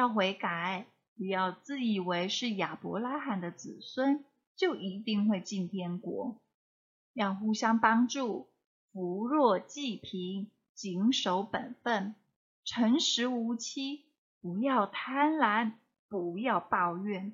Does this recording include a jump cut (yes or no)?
no